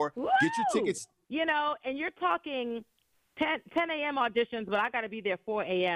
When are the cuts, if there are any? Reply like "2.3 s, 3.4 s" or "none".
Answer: 1.2 s